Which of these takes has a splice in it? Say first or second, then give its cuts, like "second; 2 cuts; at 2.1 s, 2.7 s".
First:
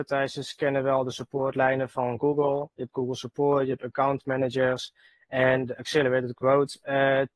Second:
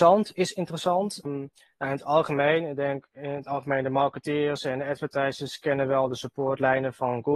second; 1 cut; at 1.2 s